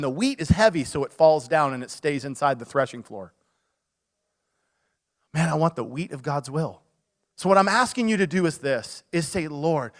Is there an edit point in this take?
no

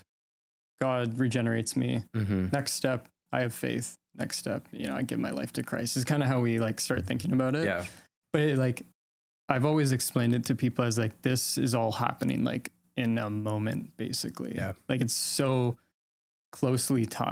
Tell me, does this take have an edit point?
no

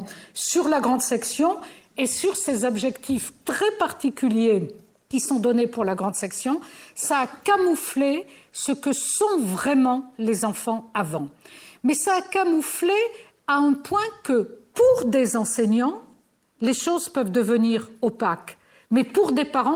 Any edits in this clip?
no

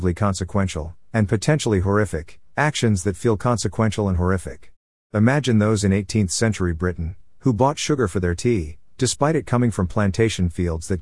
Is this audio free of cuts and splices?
yes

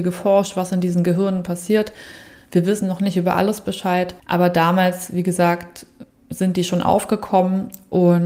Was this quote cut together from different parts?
yes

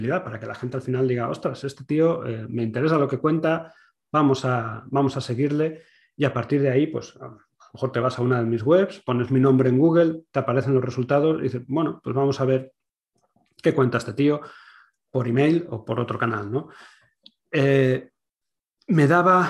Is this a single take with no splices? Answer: yes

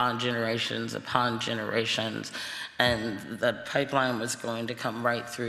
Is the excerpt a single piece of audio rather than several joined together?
yes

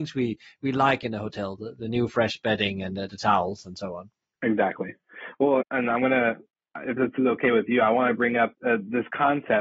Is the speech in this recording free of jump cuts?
no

